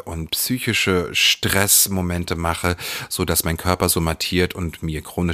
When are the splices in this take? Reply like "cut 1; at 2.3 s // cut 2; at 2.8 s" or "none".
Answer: none